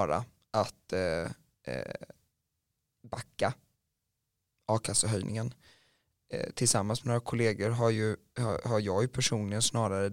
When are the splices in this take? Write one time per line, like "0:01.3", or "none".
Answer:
none

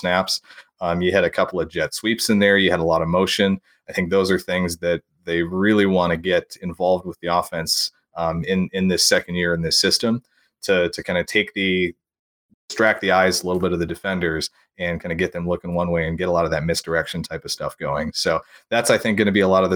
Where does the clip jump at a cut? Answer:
none

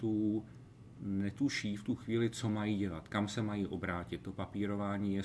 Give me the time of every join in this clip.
none

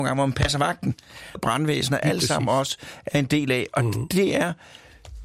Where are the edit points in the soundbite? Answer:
0:01.4

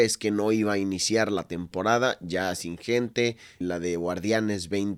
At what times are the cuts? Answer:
0:03.6

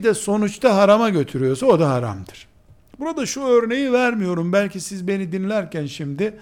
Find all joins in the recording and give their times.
none

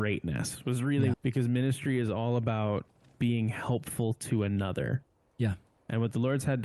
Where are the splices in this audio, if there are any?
0:01.1

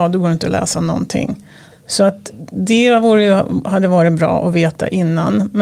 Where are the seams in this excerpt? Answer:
0:01.7

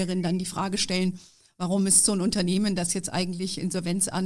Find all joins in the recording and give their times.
none

